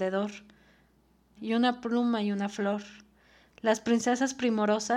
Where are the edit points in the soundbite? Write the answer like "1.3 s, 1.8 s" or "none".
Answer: 1.4 s